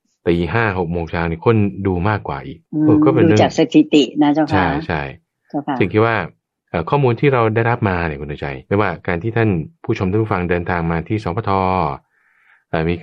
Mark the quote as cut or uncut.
cut